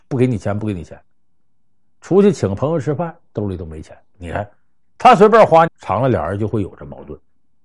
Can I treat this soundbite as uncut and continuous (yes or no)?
no